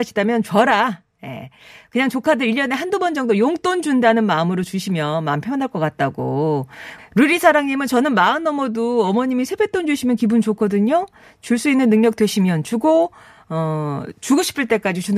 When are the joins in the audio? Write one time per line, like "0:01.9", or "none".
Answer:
0:07.0